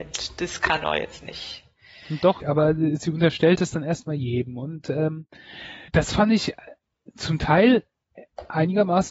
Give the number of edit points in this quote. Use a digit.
2